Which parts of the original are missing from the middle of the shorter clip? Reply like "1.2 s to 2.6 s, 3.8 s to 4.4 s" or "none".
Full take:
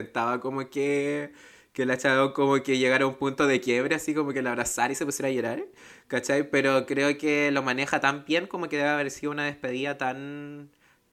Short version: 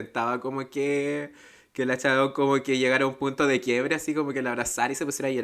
none